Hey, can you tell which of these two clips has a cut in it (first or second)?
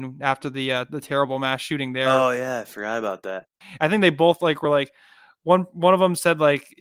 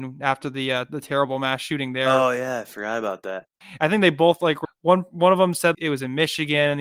second